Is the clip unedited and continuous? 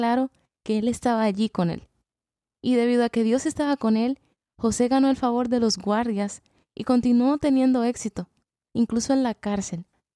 yes; 0 cuts

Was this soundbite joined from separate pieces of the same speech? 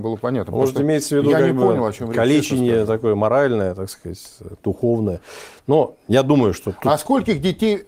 no; 0 cuts

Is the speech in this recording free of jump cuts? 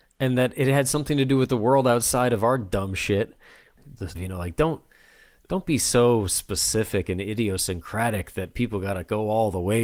no; 1 cut; at 4.1 s

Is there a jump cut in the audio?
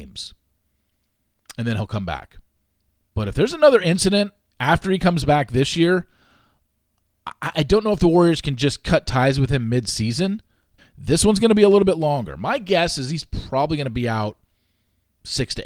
yes; 1 cut; at 10.8 s

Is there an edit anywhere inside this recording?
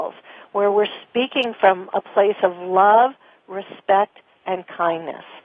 no; 0 cuts

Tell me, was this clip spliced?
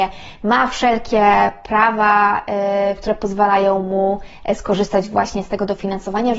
yes; 1 cut; at 3.0 s

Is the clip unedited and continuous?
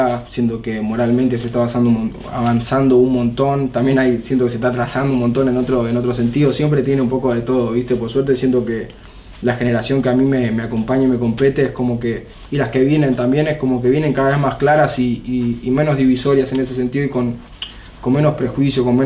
yes; 0 cuts

